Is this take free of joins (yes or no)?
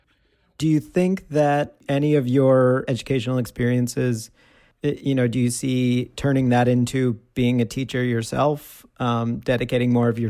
yes